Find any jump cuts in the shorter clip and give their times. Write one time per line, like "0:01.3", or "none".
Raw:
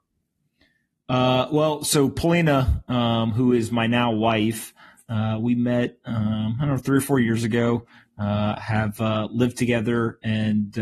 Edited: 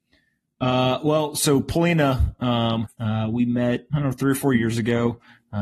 0:02.8
0:03.9

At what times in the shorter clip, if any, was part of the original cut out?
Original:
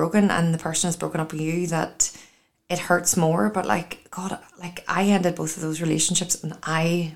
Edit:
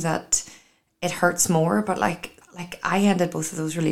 0:02.4

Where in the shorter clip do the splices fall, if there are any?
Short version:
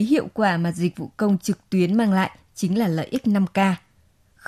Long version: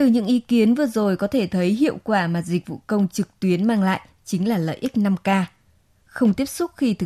none

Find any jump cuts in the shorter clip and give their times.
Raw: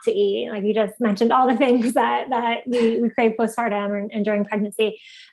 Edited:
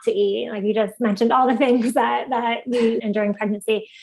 0:03.0

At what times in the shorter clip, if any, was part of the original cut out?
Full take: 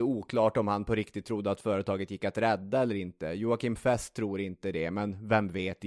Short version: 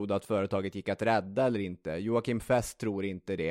none

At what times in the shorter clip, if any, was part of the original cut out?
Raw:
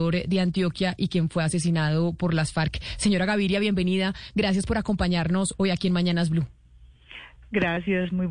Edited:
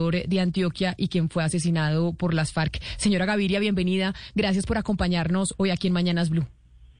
none

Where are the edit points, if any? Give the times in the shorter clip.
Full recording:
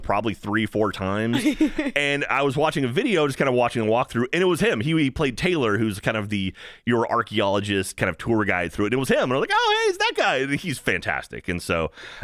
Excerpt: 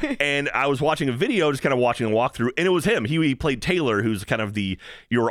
none

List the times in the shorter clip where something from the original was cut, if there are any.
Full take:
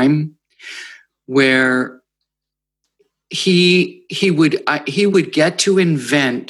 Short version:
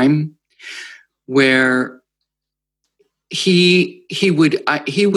none

